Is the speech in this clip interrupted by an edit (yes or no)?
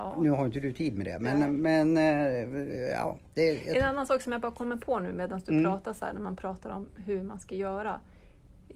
no